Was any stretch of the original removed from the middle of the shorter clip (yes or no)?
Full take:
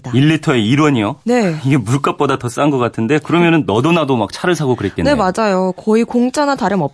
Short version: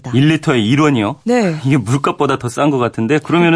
no